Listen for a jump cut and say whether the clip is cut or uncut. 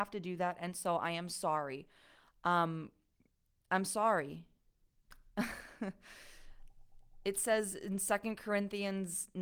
uncut